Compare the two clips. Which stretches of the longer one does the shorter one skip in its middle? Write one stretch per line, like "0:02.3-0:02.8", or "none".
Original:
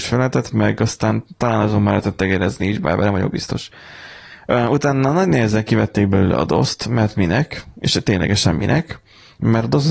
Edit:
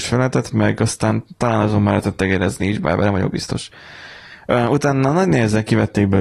none